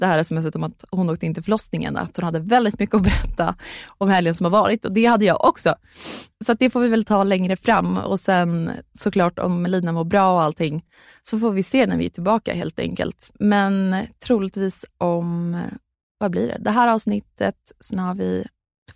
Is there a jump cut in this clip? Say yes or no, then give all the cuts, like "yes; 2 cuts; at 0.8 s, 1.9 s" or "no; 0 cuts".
no; 0 cuts